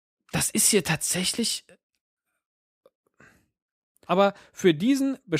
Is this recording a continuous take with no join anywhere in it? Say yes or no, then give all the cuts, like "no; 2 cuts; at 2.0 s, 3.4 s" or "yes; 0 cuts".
no; 1 cut; at 4.0 s